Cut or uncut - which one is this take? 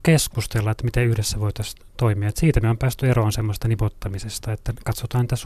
uncut